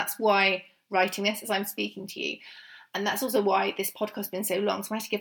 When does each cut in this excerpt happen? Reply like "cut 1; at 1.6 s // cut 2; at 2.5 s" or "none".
none

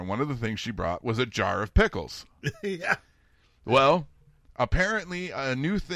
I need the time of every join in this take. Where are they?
none

